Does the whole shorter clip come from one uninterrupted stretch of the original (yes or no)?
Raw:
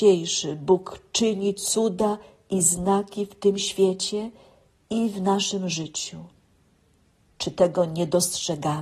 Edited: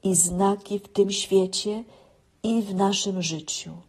yes